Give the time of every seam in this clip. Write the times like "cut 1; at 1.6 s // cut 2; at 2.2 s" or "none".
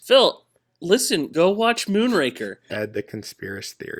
cut 1; at 2.7 s